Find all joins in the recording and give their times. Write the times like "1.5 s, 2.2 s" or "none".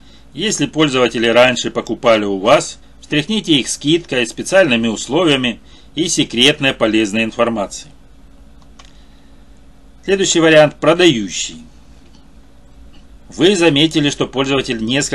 2.8 s, 13.1 s